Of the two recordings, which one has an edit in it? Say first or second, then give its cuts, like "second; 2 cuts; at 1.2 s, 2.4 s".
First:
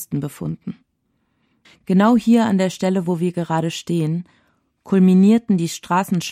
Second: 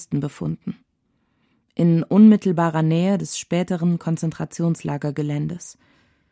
first; 1 cut; at 1.6 s